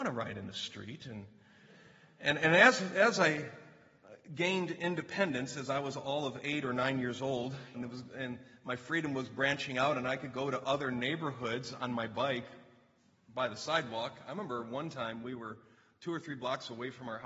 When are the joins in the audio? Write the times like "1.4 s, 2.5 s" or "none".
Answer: 7.7 s